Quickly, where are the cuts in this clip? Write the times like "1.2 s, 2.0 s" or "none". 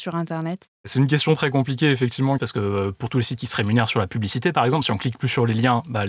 2.4 s